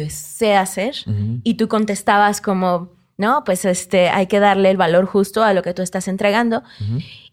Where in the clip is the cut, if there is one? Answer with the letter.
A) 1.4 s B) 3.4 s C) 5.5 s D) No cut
D